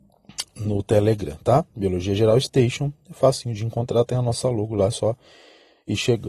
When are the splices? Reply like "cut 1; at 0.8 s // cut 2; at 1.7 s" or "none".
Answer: none